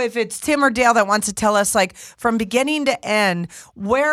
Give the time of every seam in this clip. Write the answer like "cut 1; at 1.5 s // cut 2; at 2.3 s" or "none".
none